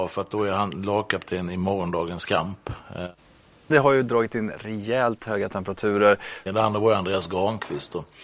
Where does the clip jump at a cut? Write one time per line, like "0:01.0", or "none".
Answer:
0:03.7
0:06.5